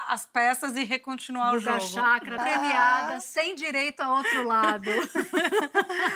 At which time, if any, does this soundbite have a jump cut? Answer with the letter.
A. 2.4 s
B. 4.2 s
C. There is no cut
A